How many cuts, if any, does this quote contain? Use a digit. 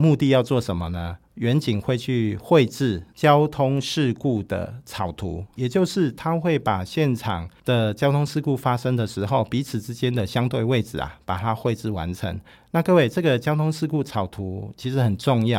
0